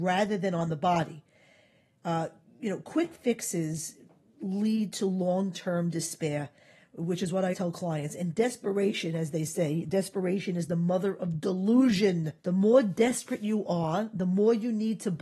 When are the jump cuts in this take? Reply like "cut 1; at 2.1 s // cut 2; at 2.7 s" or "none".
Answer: cut 1; at 7.5 s // cut 2; at 12.4 s